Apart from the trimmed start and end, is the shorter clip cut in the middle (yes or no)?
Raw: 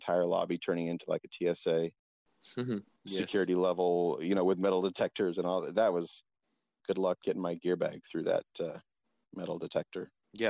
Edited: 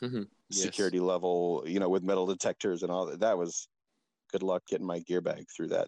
no